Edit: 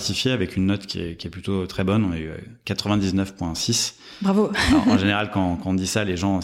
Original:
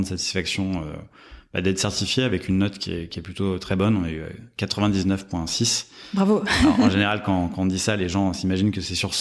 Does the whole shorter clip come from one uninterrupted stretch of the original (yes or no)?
yes